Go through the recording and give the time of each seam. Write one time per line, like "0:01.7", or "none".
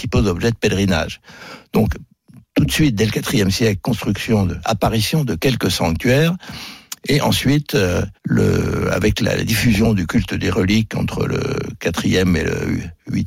0:08.2

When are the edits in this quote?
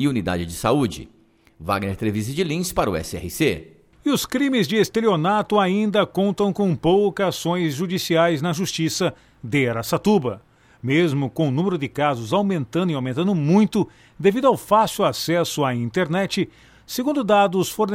none

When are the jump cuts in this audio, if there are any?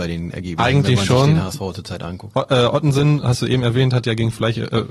0:02.3

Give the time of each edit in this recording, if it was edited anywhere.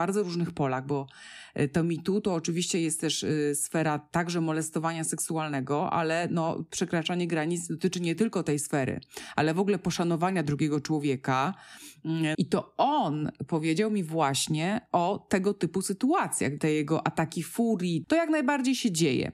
0:12.3
0:16.6
0:18.0

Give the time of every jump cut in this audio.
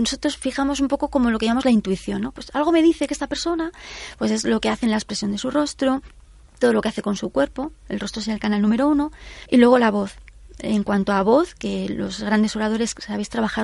0:09.5

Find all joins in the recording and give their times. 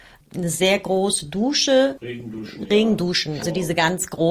0:03.4

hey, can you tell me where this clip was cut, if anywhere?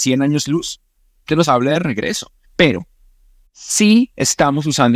0:01.3
0:02.4

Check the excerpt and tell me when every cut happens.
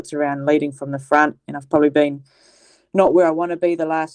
none

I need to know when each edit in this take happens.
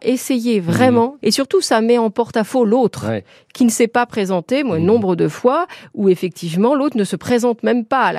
0:01.2

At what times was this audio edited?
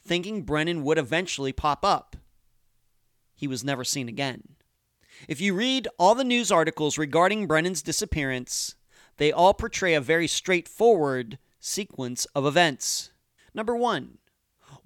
0:13.4

